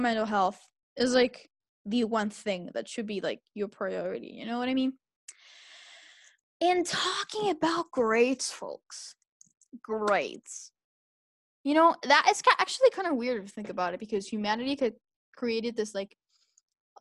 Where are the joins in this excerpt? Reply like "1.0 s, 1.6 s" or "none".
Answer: none